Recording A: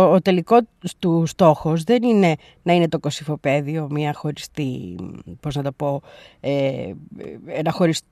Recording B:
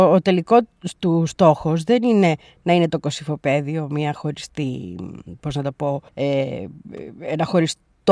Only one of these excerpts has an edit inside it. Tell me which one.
B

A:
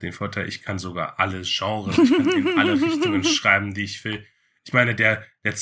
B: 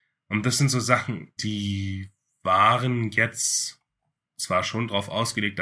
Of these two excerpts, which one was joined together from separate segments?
B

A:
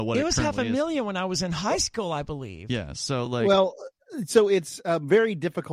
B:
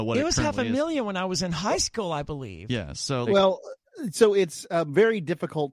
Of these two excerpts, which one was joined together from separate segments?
B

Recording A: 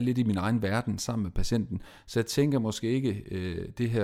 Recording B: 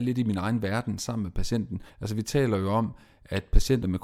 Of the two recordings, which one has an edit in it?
B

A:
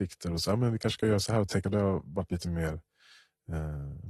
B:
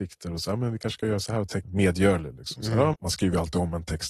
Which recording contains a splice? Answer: B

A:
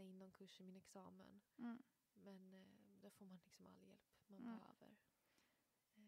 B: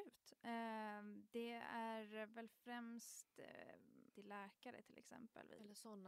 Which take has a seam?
B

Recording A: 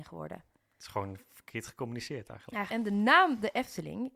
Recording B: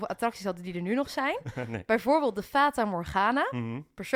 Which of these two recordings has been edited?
A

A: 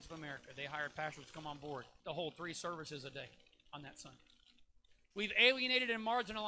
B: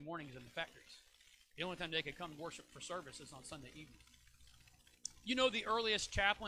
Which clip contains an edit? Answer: A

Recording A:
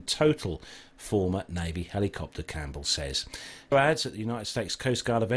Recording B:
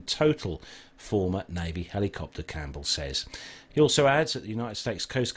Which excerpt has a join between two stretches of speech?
A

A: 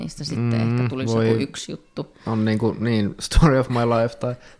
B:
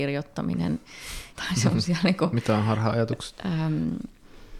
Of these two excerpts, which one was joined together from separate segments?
B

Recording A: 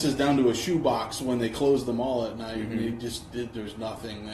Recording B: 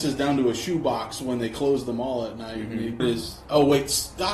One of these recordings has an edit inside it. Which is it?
B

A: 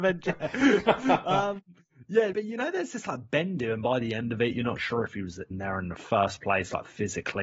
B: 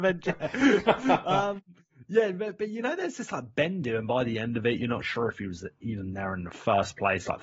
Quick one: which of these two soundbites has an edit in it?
A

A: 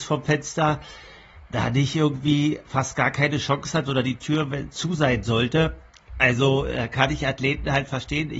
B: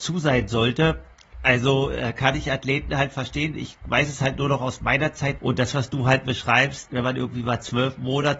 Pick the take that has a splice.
B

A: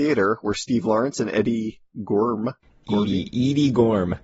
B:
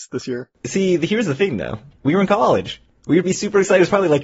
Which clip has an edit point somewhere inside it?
B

